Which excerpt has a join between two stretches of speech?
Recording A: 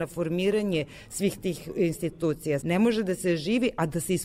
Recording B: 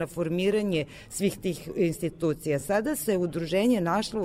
A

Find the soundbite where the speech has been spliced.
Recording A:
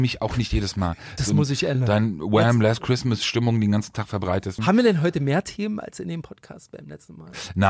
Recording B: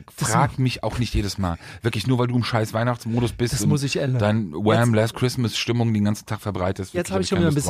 A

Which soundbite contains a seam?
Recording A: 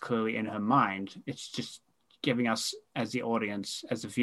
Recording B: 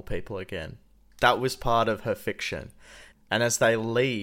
B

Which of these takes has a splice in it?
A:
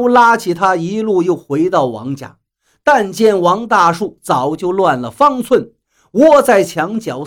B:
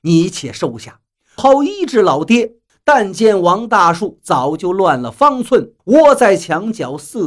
B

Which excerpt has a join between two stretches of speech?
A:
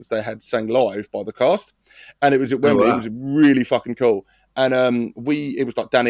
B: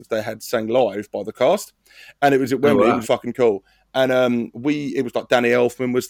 B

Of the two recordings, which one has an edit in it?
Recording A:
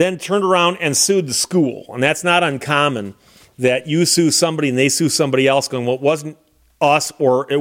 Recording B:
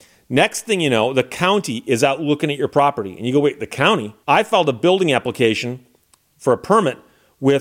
B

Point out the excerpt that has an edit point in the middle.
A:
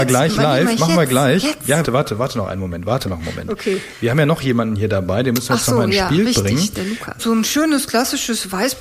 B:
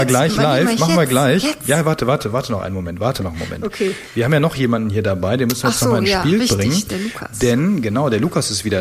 A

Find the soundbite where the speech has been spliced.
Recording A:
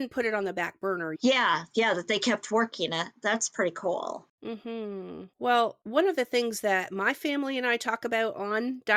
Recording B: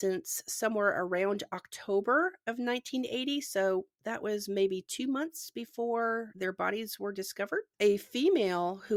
A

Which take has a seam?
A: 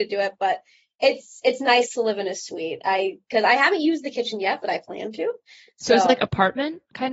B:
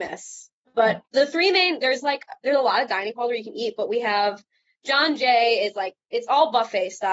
B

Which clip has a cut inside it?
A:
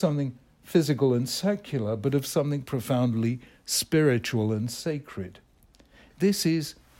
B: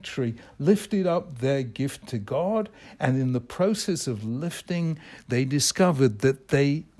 A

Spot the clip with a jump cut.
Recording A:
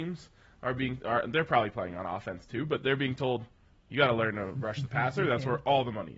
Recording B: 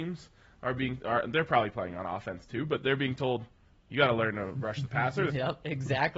B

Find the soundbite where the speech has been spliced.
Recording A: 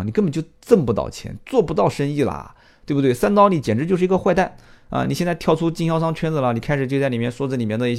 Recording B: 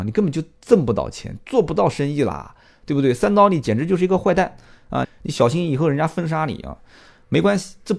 B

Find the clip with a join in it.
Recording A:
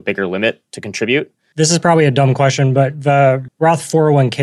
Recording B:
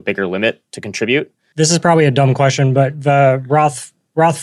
A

